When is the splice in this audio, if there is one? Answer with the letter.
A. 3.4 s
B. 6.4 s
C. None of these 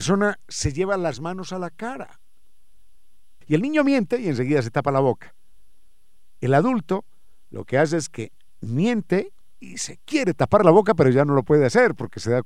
A